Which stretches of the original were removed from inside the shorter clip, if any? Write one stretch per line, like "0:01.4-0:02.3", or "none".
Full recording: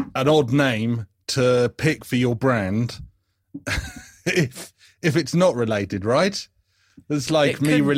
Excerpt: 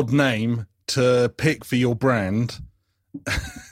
none